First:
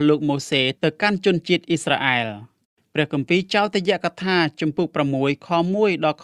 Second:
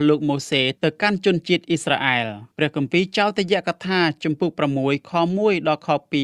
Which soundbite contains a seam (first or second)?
second